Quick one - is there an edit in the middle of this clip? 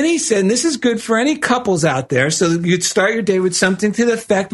no; 0 cuts

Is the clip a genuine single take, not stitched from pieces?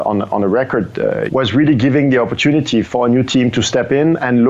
no; 2 cuts; at 1.3 s, 2.8 s

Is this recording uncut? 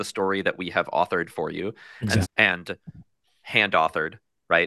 no; 1 cut; at 2.2 s

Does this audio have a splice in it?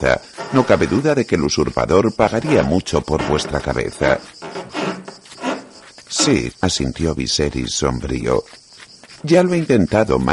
yes; 1 cut; at 6.5 s

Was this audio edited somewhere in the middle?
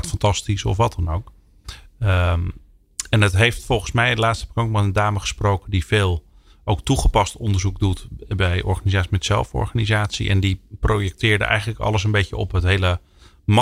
no; 0 cuts

